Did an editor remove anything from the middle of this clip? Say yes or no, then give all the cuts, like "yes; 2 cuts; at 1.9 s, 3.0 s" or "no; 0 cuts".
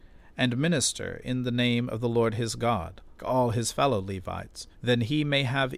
yes; 2 cuts; at 3.2 s, 4.7 s